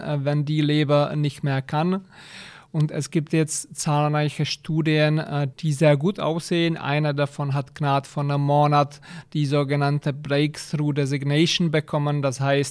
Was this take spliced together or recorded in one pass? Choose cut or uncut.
cut